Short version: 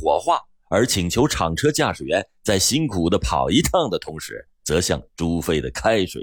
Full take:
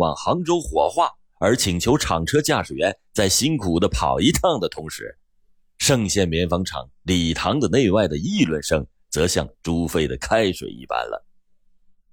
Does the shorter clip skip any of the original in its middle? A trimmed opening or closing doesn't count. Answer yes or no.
yes